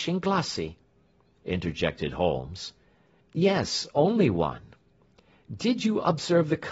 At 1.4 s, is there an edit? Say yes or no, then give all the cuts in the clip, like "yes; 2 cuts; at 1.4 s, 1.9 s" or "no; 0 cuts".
yes; 1 cut; at 1.4 s